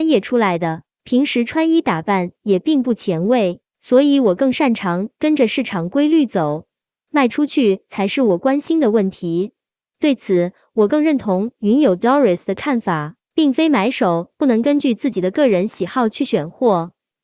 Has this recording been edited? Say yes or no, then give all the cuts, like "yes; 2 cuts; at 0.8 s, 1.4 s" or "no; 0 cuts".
no; 0 cuts